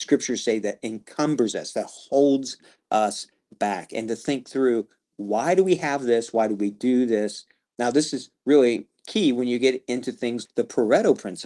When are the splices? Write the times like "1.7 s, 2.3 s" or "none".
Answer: 7.7 s, 10.4 s

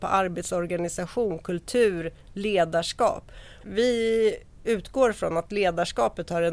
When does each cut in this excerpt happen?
3.6 s

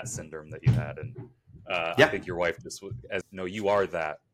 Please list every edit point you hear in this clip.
3.2 s

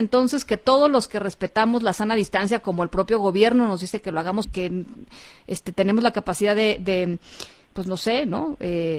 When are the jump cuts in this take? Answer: 4.4 s

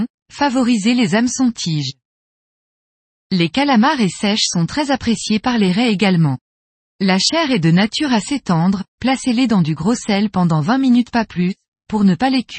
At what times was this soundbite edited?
6.9 s, 8.9 s

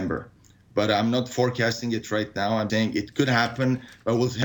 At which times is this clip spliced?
2.7 s

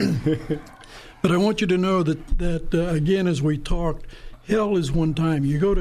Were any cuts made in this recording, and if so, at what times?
none

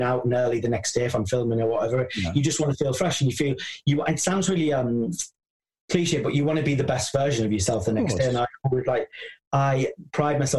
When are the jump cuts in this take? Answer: none

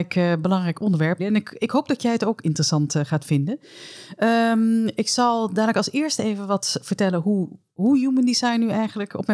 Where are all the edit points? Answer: 1.2 s

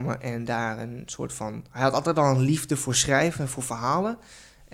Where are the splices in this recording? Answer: none

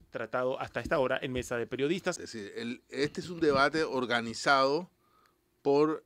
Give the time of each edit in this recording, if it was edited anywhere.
2.2 s

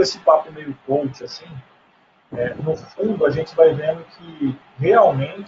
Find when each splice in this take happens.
2.3 s

